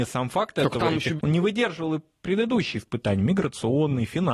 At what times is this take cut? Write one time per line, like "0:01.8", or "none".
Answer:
0:01.2